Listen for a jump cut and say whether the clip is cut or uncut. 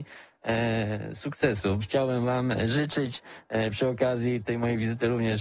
cut